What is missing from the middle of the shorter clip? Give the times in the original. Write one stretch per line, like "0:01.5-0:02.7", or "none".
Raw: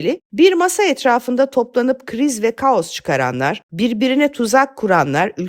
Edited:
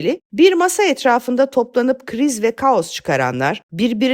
none